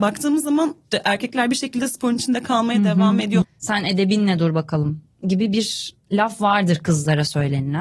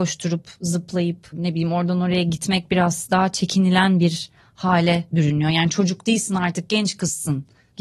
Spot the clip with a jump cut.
first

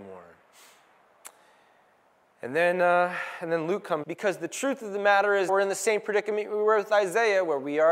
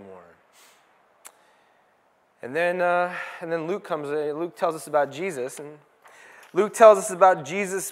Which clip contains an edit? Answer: first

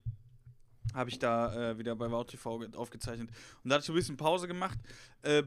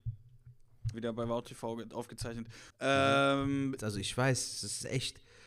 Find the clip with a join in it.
second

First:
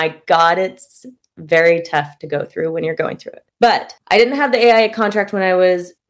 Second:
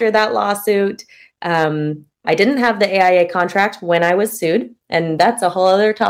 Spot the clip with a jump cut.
second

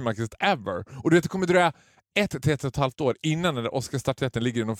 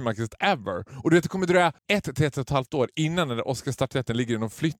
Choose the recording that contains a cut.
second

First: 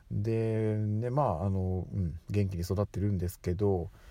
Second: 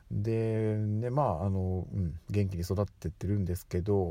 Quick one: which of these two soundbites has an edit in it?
first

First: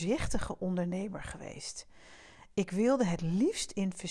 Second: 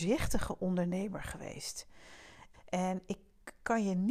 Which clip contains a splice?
second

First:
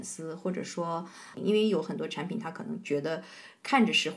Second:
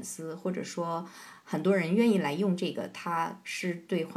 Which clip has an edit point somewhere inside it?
first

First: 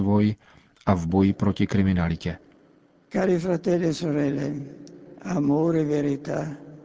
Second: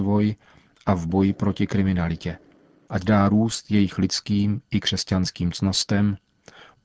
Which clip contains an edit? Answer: second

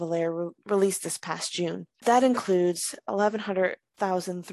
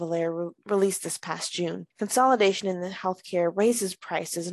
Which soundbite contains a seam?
second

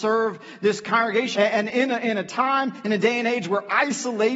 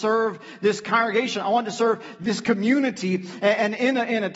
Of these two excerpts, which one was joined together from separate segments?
first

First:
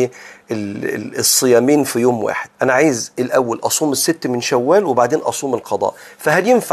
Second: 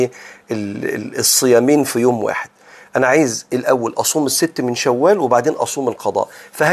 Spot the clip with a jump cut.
first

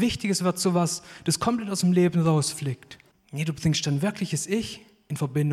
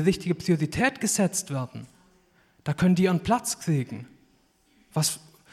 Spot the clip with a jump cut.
first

